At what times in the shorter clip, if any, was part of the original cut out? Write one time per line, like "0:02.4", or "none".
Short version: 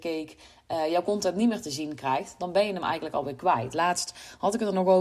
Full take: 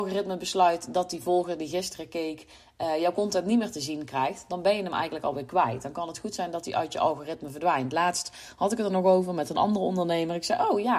0:03.7